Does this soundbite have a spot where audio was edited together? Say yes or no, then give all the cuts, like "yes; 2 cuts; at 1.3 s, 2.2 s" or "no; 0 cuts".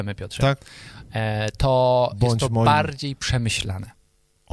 no; 0 cuts